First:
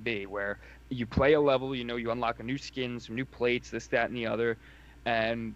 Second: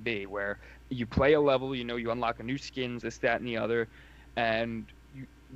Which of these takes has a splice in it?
second; 1 cut; at 3.0 s

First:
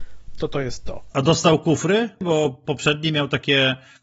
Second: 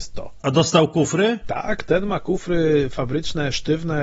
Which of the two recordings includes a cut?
second; 1 cut; at 1.4 s

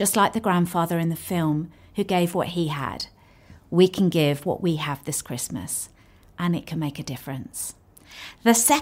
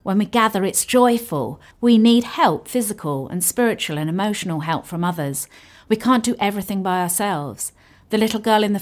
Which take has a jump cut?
second; 1 cut; at 1.7 s

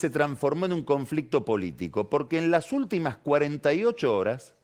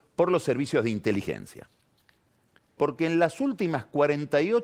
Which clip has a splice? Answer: second; 1 cut; at 2.8 s

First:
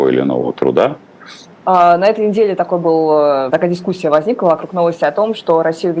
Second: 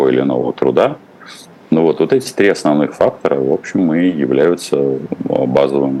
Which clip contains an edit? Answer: first; 2 cuts; at 1.5 s, 3.5 s

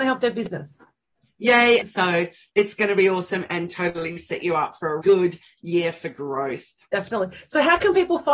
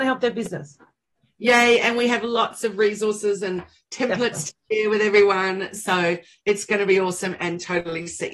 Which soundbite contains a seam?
first; 2 cuts; at 1.8 s, 5.0 s

